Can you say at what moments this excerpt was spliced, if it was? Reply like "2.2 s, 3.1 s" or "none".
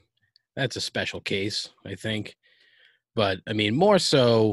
none

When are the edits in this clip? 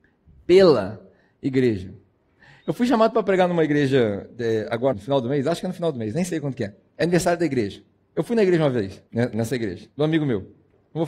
4.9 s, 9.1 s

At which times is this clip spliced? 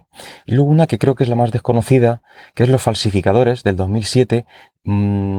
none

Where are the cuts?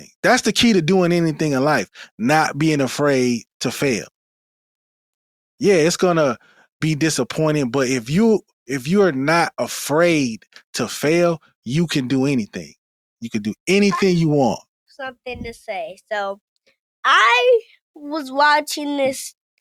13.2 s

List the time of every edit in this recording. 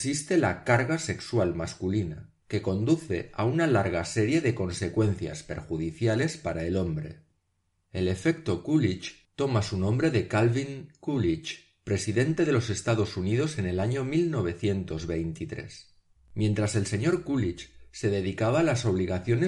16.2 s

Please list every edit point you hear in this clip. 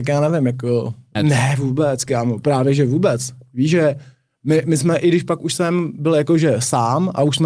1.1 s

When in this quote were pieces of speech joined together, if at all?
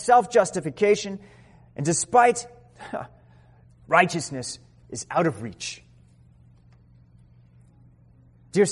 3.7 s

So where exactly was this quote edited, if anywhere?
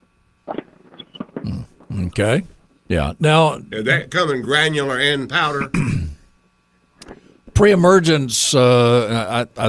2.9 s

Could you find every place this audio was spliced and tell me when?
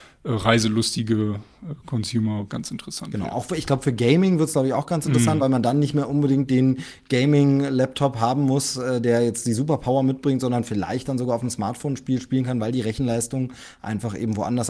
none

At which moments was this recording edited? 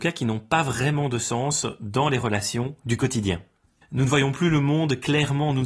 3.8 s

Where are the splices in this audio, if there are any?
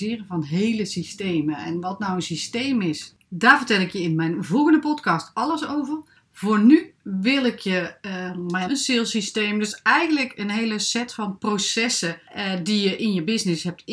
8.7 s

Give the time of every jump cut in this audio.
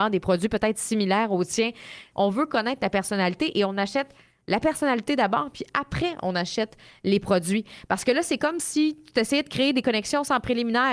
2.1 s

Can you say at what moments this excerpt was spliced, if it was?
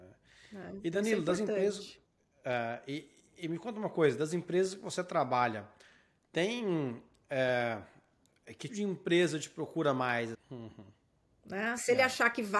8.7 s, 10.3 s

